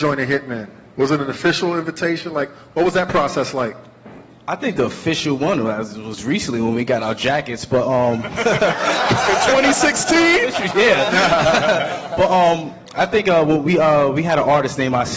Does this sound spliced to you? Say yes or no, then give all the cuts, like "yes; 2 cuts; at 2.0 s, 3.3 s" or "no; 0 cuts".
no; 0 cuts